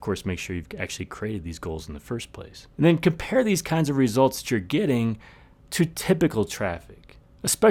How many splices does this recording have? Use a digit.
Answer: 1